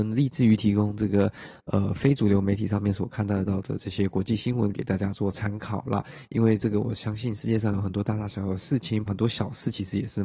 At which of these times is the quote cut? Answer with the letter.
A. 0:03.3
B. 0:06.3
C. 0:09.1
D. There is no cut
C